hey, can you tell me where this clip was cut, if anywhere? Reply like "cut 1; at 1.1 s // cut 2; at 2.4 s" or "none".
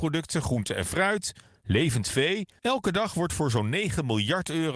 cut 1; at 2.6 s

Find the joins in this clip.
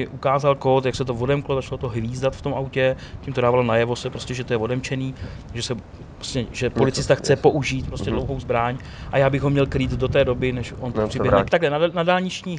cut 1; at 11.5 s

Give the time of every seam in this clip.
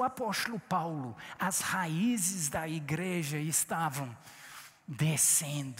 none

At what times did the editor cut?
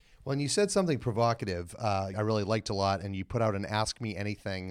cut 1; at 2.1 s

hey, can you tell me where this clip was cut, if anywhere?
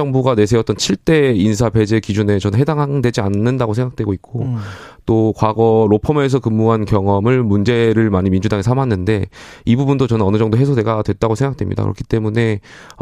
none

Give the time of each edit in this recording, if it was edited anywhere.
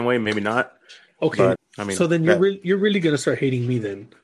cut 1; at 1.6 s

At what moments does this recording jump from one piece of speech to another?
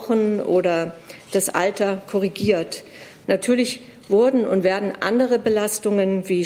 cut 1; at 3.2 s

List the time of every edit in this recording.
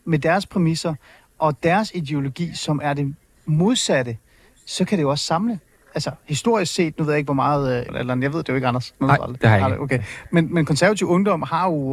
cut 1; at 7.9 s

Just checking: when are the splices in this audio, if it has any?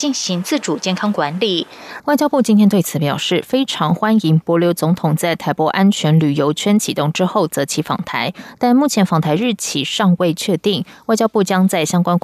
cut 1; at 2.0 s

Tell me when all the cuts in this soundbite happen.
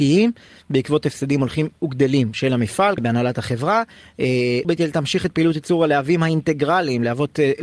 cut 1; at 3.0 s // cut 2; at 4.6 s

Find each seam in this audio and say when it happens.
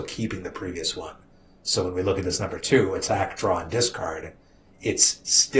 none

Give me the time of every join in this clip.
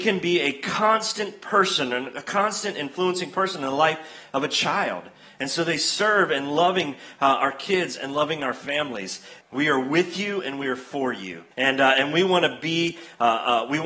cut 1; at 9.4 s // cut 2; at 11.5 s

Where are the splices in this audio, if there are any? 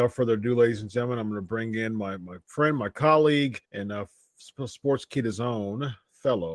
cut 1; at 3.6 s

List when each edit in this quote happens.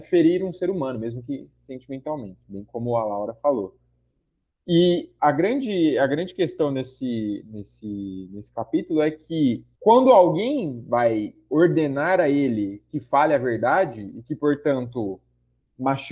cut 1; at 2.4 s

